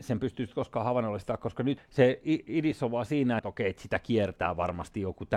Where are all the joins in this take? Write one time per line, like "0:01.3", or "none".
0:01.8
0:03.4